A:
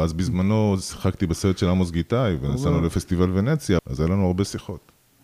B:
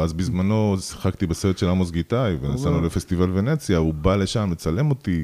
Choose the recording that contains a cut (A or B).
A